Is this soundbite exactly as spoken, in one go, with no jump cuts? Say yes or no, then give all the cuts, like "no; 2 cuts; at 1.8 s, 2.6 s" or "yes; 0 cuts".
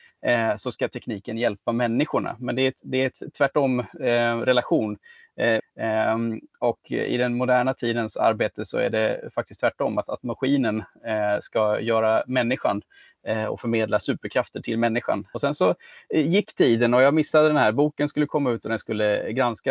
no; 2 cuts; at 5.6 s, 15.3 s